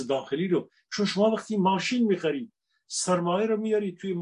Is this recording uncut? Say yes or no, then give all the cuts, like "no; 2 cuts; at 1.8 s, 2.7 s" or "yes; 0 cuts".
yes; 0 cuts